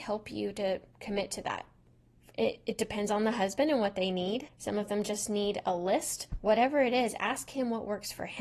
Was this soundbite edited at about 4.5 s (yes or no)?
yes